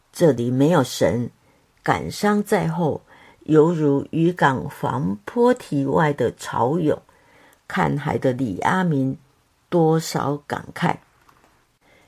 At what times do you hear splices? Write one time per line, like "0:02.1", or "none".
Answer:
0:01.7

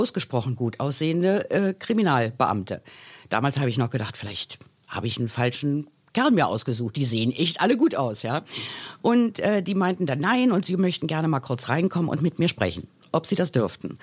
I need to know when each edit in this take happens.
none

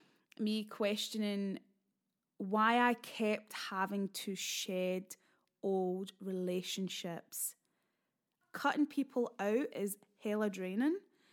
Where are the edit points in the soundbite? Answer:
0:08.4

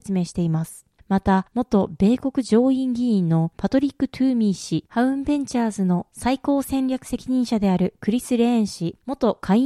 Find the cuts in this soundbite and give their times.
0:01.5
0:04.9

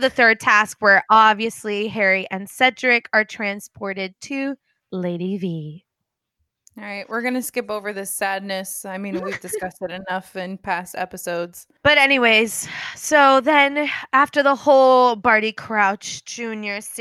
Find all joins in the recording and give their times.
0:11.8

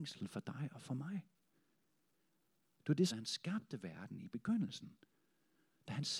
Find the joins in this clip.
0:03.1

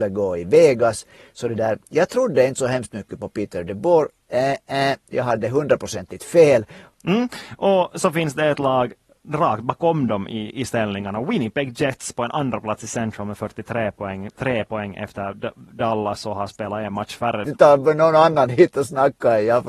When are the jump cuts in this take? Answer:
0:17.4

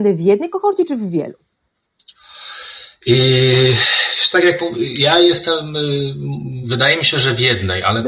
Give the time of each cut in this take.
none

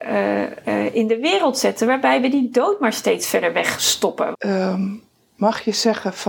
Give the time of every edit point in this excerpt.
0:04.3

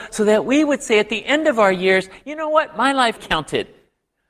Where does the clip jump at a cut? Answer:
0:03.2

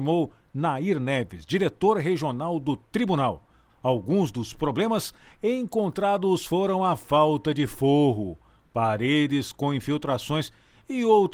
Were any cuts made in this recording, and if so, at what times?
0:03.7

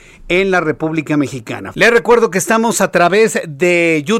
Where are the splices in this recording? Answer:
0:01.7

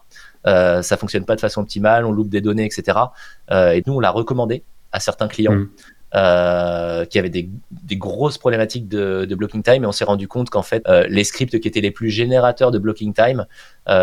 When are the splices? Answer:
0:03.8
0:10.8

